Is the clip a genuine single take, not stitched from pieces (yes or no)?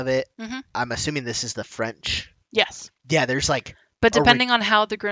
no